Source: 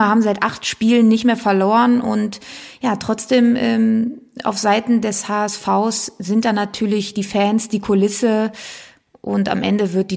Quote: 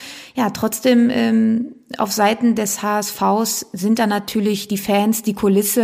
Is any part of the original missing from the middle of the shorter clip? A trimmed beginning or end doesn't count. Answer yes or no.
no